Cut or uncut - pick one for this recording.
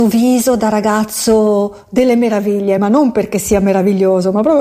uncut